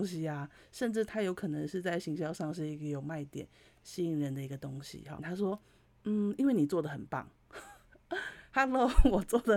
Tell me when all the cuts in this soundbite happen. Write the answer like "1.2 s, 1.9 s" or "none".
5.2 s